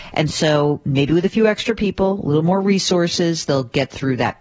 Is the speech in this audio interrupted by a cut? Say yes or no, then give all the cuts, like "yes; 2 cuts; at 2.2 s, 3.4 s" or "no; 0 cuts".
no; 0 cuts